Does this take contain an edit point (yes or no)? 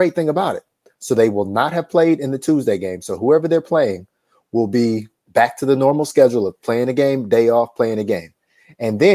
no